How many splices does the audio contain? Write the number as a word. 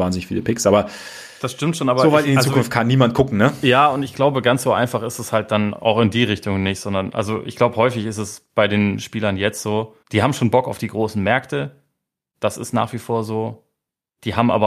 one